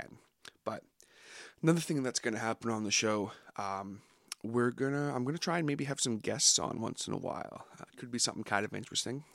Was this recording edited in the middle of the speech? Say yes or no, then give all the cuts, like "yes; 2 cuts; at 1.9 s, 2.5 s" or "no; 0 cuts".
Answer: no; 0 cuts